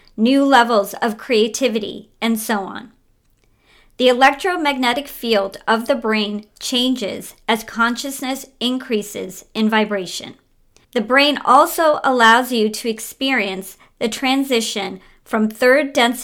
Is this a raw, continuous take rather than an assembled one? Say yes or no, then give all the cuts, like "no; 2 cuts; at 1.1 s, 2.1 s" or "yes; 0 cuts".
no; 1 cut; at 10.8 s